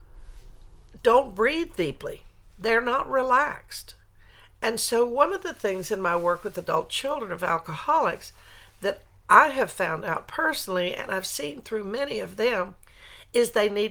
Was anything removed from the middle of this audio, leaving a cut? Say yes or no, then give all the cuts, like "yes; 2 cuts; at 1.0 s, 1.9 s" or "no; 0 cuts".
no; 0 cuts